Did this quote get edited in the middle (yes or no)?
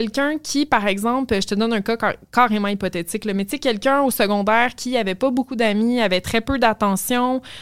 no